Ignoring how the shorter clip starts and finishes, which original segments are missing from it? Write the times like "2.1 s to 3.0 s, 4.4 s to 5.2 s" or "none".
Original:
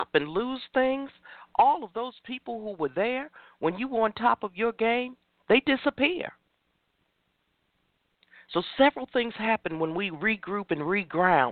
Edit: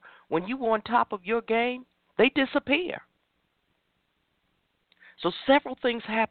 none